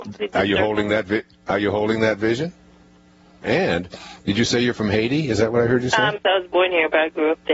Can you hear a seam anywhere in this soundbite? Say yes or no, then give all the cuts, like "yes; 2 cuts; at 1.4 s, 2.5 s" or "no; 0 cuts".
yes; 2 cuts; at 3.4 s, 6.2 s